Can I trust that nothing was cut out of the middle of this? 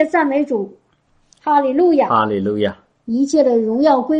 yes; 0 cuts

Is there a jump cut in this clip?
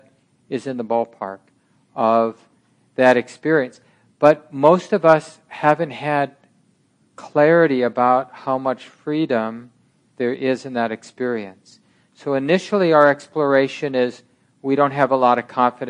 no; 0 cuts

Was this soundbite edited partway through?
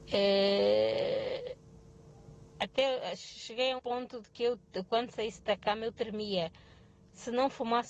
yes; 1 cut; at 3.8 s

